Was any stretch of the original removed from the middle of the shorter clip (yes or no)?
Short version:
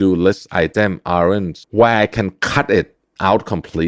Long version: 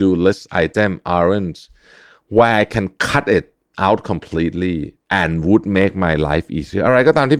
yes